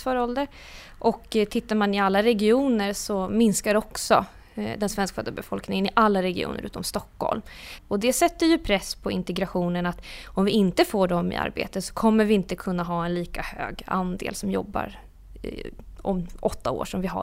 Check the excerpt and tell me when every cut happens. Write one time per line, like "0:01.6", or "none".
0:07.8